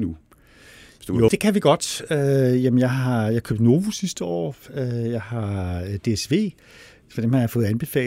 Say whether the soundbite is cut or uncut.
cut